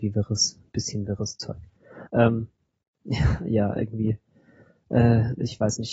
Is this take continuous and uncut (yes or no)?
no